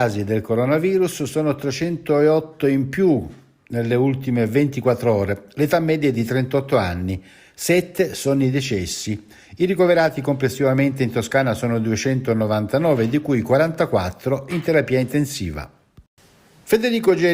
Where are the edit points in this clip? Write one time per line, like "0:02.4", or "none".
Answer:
none